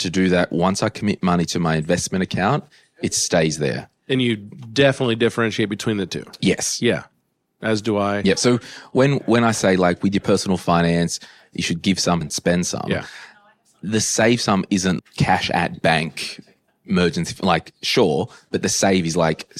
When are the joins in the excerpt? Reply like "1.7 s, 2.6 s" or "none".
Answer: 12.2 s, 15.0 s

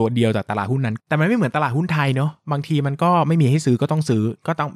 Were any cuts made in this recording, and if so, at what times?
1.0 s

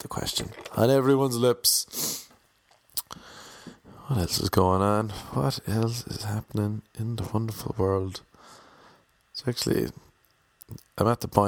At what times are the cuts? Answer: none

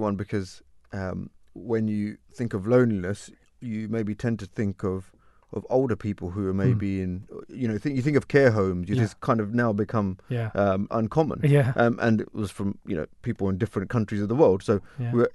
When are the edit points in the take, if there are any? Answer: 9.0 s, 10.9 s

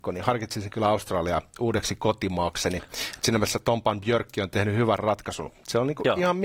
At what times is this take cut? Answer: none

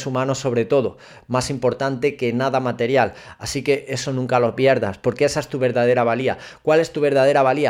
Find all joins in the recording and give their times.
none

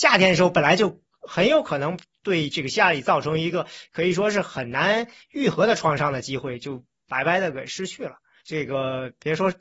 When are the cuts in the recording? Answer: 8.4 s

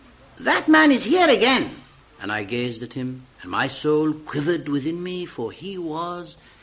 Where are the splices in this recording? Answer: 2.0 s, 3.3 s

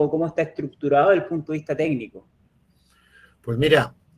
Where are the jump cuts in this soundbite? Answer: none

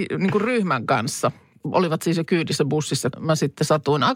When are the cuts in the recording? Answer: 3.1 s

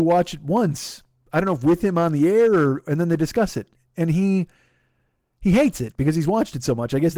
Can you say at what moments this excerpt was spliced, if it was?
none

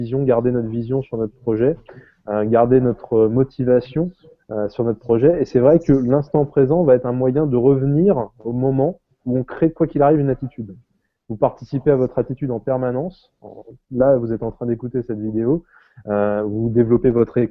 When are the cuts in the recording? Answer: none

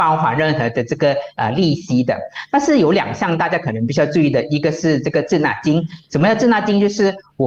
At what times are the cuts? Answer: none

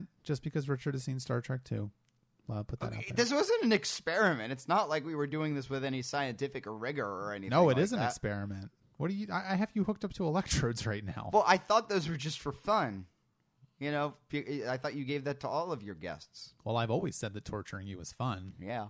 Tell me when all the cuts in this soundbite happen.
none

